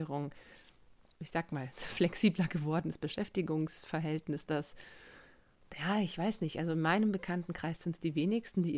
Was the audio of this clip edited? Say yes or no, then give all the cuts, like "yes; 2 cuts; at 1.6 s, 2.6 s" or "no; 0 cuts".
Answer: yes; 1 cut; at 1.1 s